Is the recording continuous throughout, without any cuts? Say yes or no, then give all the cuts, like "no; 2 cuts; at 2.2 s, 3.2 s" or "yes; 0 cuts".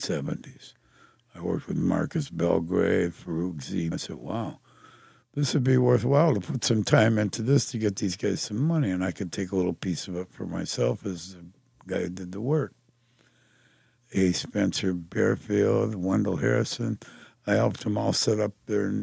no; 2 cuts; at 3.9 s, 14.0 s